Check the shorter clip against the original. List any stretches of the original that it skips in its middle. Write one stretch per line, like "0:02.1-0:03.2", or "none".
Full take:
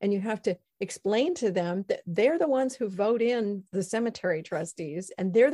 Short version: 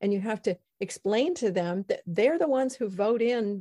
none

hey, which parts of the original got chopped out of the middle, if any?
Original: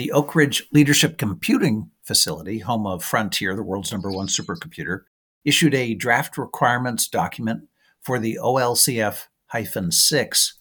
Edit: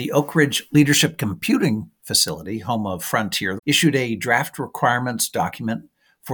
0:03.6-0:05.3

